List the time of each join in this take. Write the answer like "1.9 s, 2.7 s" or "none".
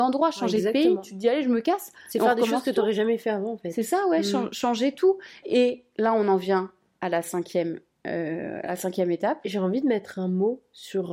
5.4 s